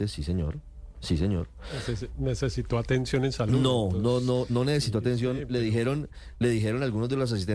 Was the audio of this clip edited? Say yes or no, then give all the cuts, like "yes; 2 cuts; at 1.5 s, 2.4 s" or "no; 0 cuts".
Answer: no; 0 cuts